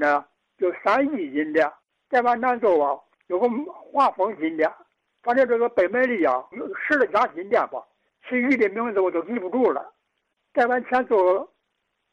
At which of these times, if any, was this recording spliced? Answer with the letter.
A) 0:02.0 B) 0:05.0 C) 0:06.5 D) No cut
C